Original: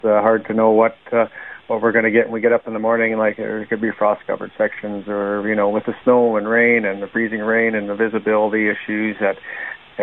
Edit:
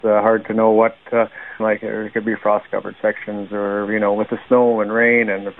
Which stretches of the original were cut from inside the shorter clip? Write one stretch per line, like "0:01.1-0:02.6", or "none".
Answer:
0:01.6-0:03.2